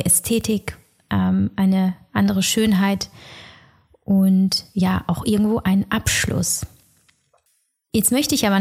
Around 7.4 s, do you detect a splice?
no; 0 cuts

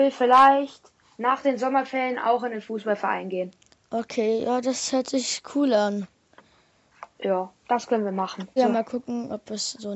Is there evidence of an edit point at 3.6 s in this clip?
no; 2 cuts; at 7.1 s, 8.6 s

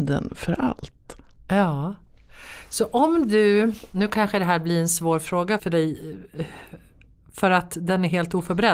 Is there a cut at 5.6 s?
yes; 1 cut; at 5.6 s

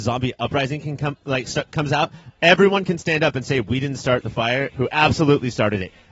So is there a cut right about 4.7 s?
yes; 1 cut; at 4.7 s

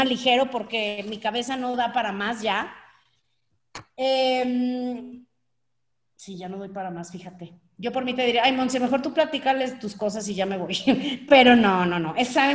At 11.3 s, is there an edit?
no; 0 cuts

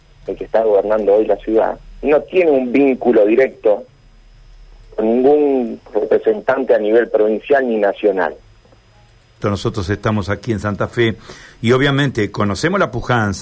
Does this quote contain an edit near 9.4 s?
yes; 1 cut; at 9.4 s

